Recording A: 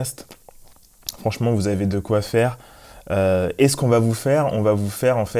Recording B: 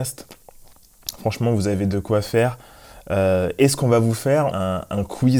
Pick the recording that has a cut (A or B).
B